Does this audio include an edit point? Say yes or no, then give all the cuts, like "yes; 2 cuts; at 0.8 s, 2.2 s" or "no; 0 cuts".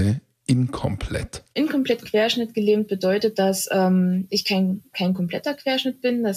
yes; 1 cut; at 4.9 s